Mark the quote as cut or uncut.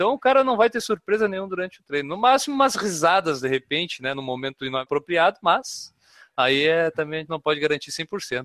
uncut